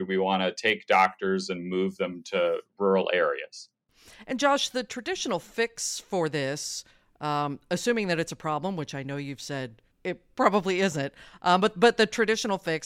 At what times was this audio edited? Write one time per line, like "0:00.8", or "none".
0:09.9